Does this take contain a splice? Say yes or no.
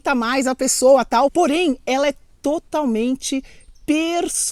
yes